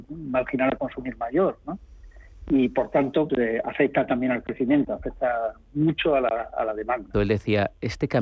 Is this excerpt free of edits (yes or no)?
no